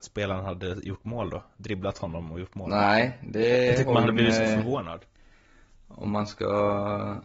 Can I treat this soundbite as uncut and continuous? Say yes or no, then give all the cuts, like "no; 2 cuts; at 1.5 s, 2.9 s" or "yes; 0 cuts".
yes; 0 cuts